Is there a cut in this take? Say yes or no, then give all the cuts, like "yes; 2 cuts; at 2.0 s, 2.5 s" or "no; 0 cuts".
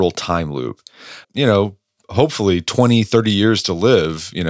yes; 1 cut; at 1.2 s